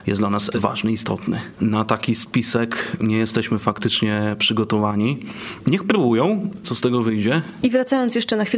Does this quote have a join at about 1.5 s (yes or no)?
yes